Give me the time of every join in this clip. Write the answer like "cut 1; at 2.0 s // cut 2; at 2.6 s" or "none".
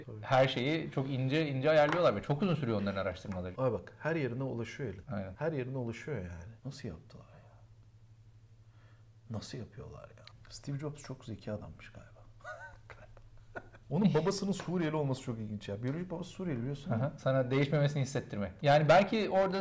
cut 1; at 17.2 s // cut 2; at 18.6 s